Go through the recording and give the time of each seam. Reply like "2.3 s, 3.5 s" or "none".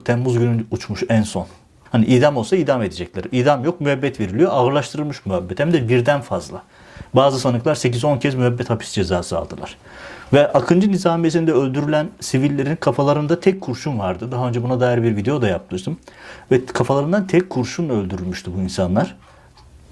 1.9 s